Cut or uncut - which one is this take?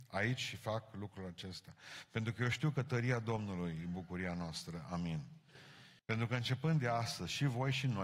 cut